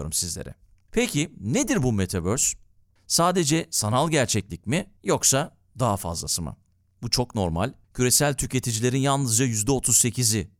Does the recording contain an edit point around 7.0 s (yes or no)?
yes